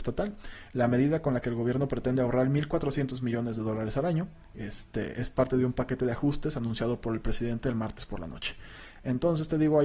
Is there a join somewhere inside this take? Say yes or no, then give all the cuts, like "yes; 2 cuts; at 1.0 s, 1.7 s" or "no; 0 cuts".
no; 0 cuts